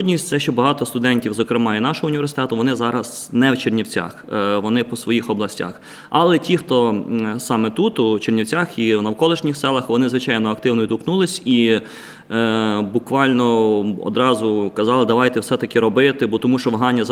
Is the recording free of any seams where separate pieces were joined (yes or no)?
yes